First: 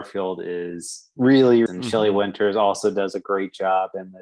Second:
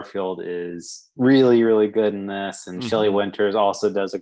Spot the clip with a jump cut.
first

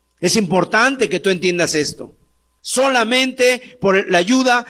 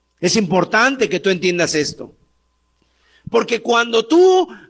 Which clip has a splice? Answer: first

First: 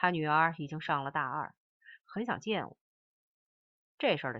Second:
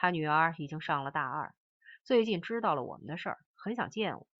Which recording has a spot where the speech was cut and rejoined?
first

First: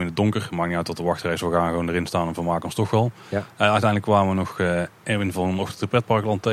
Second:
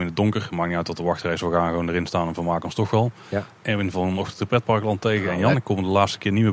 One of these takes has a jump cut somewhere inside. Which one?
second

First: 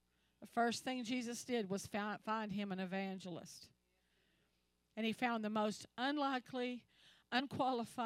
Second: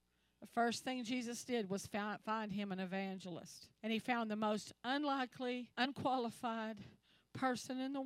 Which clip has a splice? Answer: second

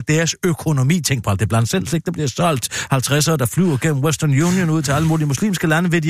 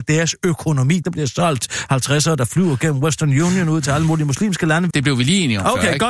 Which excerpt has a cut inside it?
second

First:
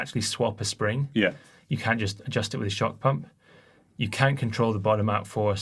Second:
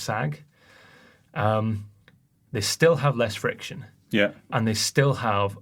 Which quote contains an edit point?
second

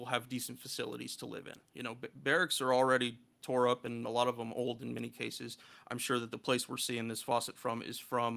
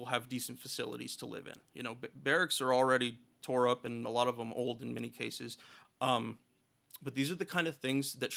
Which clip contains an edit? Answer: second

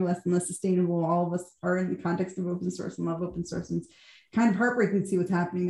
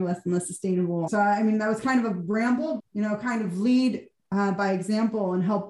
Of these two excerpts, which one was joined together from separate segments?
second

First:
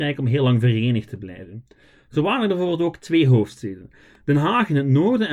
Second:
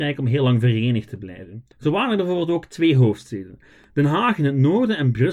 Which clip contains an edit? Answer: second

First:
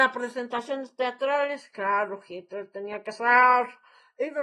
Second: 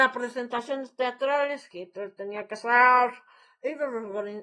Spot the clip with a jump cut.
second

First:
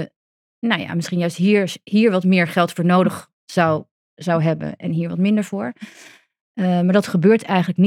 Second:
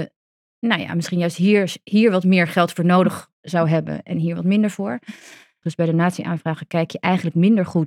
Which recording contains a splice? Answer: second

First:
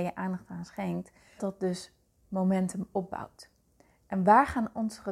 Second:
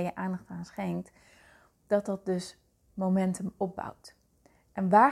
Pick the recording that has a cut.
first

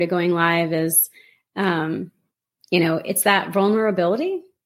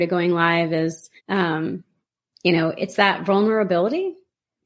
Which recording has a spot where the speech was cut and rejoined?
second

